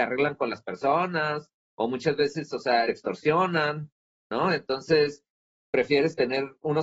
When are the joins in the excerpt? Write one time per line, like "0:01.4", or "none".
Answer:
0:02.8

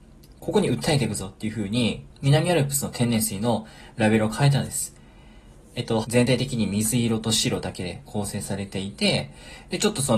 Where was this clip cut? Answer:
0:02.1
0:06.0

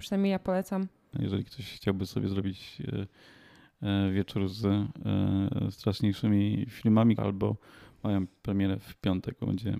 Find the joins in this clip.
0:01.1
0:07.2

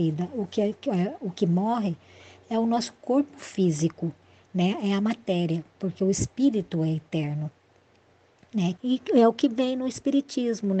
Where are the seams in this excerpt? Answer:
0:08.8

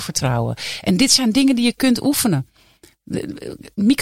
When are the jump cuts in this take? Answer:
none

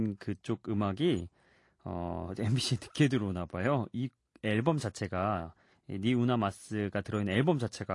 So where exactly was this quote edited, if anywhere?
none

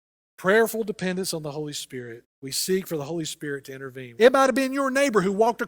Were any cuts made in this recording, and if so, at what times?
0:02.3
0:04.2

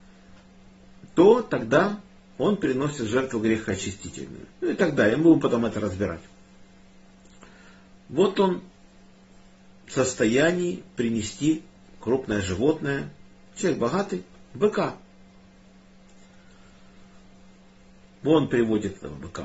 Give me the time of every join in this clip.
0:04.5

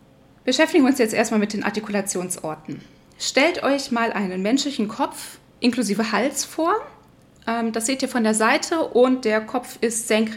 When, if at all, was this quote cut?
none

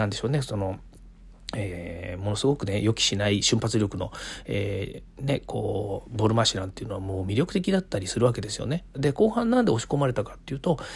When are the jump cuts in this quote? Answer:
0:08.9

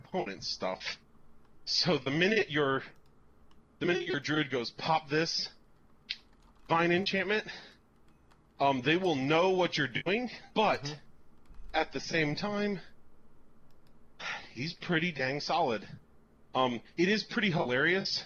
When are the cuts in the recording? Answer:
0:10.5

